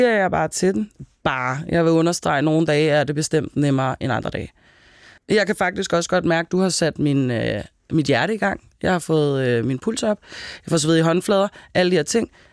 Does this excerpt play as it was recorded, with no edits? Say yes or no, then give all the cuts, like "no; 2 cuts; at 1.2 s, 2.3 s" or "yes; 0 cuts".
no; 1 cut; at 5.2 s